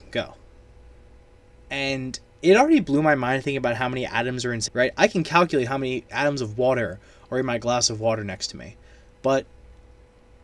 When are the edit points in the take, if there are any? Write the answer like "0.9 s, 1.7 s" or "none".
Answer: 4.7 s